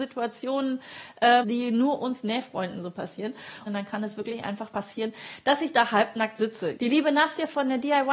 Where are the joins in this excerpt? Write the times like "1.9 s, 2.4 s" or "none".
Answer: 1.4 s, 3.7 s, 6.8 s

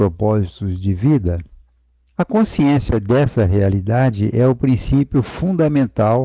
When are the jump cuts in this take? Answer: 2.1 s

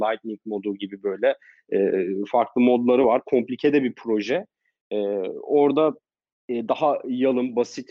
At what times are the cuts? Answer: none

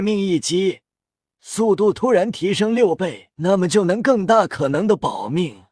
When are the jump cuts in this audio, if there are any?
3.3 s

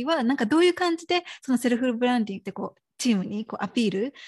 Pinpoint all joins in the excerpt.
2.4 s

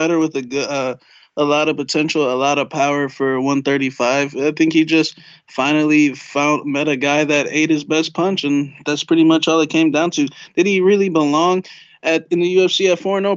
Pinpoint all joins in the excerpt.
none

